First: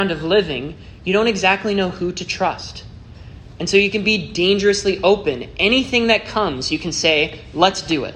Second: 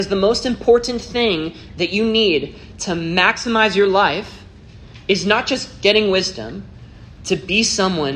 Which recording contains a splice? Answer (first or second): second